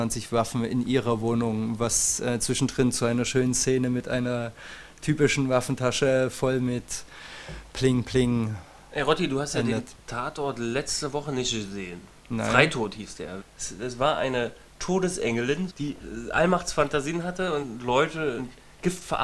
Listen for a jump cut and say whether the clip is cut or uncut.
cut